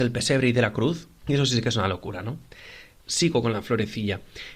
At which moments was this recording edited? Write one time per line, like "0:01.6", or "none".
0:01.2
0:03.1